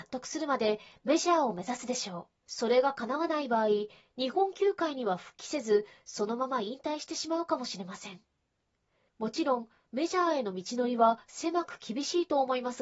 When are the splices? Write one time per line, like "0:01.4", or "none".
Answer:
0:02.4